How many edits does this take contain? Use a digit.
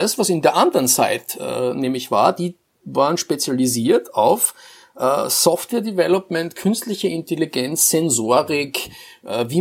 0